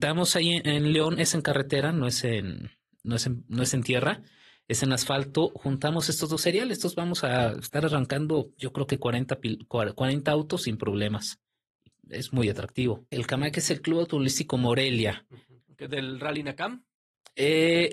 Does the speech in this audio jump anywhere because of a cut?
yes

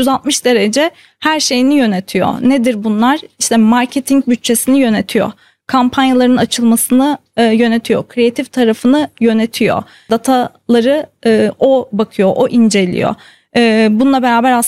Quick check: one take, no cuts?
yes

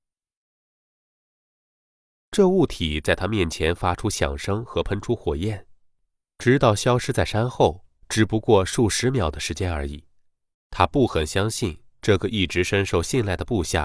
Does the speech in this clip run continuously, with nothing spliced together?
no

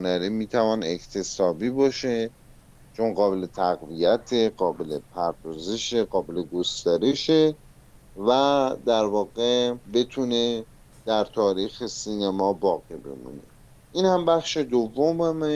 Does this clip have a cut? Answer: yes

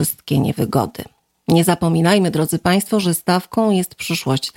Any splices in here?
no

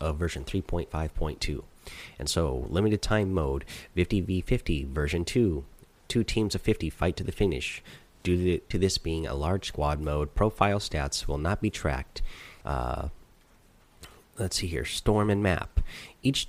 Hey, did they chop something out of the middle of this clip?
yes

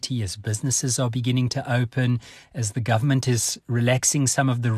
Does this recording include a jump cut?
no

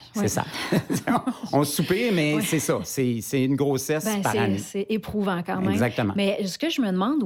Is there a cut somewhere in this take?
no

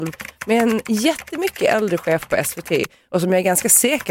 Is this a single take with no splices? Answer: yes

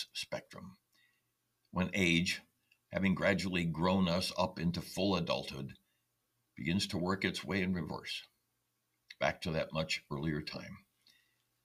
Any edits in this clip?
no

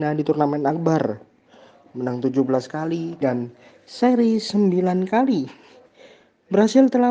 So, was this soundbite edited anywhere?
yes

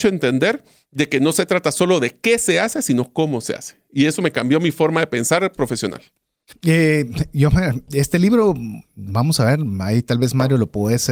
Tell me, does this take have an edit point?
yes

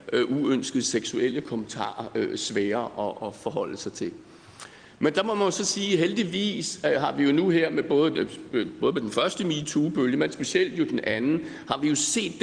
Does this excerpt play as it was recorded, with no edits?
yes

